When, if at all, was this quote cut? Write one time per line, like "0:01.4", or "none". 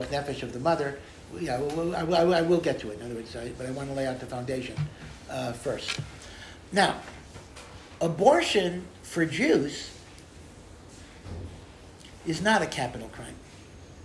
none